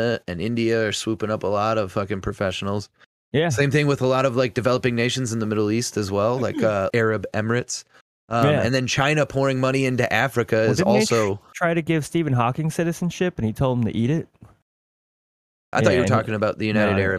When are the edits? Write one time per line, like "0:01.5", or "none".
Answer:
0:06.9
0:15.7